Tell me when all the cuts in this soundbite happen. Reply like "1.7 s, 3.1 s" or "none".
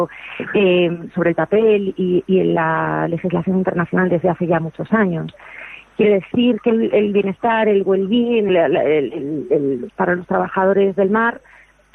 8.5 s, 9.9 s